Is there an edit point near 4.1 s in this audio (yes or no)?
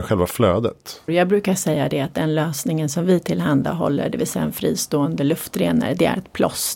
no